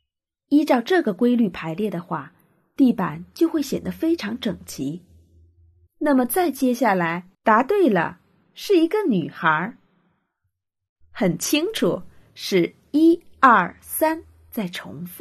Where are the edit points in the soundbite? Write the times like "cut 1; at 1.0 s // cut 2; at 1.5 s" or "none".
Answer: cut 1; at 5.9 s // cut 2; at 7.3 s // cut 3; at 11.0 s